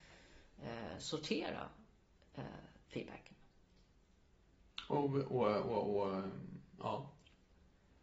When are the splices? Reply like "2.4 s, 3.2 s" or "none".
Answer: none